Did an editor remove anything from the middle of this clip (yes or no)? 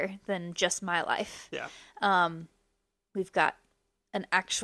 no